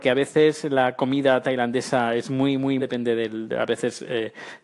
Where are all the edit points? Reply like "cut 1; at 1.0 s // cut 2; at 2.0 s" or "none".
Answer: cut 1; at 2.8 s